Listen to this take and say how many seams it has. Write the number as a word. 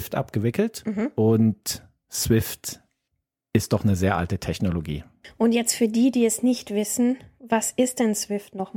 zero